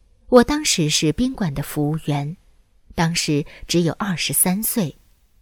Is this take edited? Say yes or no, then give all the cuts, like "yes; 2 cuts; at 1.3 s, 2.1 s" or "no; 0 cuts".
no; 0 cuts